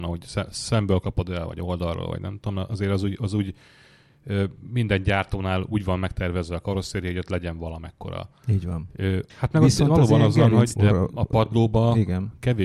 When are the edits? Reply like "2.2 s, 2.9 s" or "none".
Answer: 9.3 s, 10.8 s